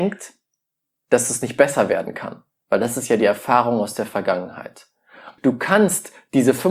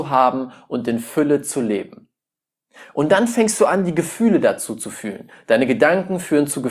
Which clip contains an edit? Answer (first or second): first